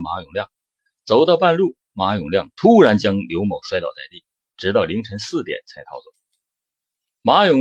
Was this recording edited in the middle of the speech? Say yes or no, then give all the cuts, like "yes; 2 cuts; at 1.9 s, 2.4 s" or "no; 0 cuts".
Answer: yes; 1 cut; at 4.4 s